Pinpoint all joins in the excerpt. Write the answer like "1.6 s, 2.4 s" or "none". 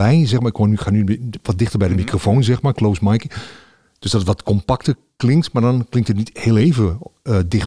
none